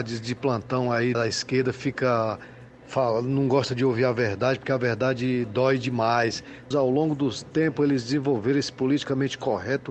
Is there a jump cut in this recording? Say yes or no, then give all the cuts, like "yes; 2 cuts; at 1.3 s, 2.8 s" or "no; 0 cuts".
yes; 2 cuts; at 1.1 s, 6.7 s